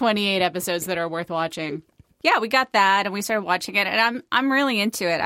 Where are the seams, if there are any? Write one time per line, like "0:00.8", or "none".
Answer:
none